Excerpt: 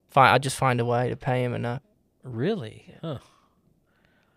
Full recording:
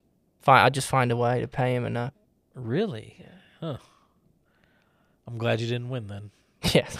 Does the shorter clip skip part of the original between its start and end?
yes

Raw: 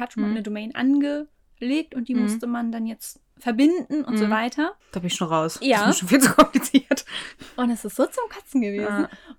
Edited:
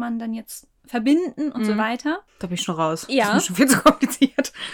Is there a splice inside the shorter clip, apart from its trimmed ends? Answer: no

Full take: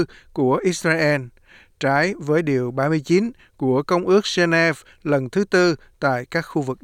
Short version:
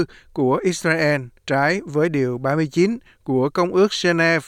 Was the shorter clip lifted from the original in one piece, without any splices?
no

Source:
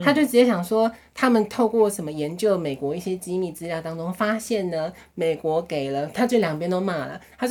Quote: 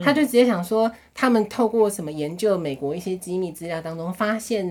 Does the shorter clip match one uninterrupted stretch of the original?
yes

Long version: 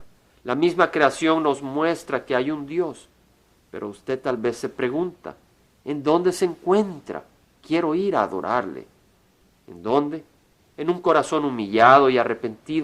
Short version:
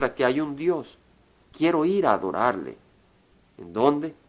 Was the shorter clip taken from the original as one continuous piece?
no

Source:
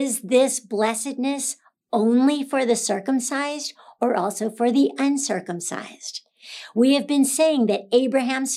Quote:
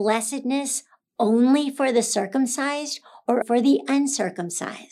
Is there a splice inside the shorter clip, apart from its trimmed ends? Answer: yes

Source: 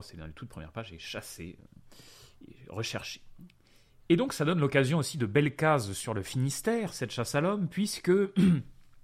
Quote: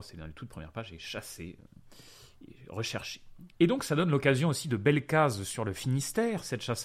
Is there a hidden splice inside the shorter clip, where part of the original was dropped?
yes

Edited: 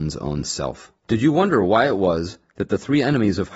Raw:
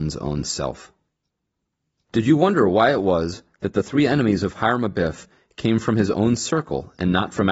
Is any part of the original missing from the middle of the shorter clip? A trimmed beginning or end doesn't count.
yes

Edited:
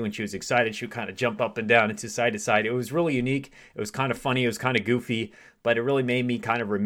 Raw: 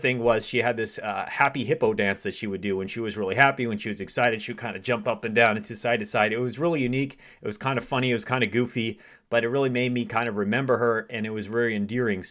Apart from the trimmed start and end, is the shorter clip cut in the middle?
no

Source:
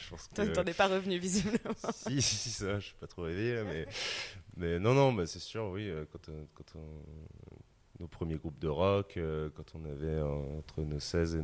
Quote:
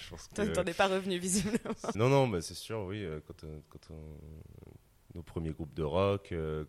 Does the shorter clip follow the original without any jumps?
no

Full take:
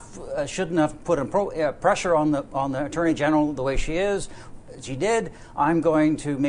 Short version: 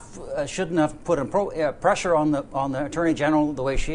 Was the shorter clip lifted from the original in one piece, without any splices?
yes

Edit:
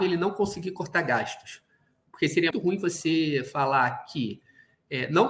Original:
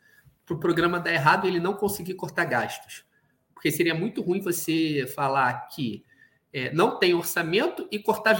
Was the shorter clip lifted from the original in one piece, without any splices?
no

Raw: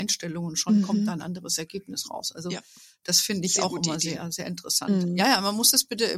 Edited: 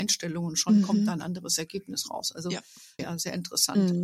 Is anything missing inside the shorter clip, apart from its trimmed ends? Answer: yes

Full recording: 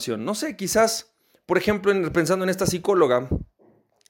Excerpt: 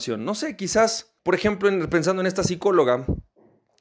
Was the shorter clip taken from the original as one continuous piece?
no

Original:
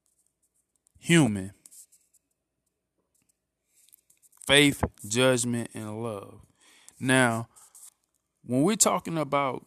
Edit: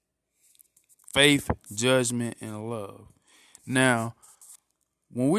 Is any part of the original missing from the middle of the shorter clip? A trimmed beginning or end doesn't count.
no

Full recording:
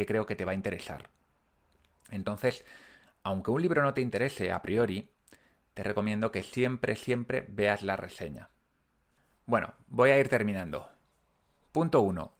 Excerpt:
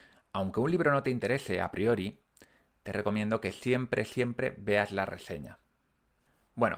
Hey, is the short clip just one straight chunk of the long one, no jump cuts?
yes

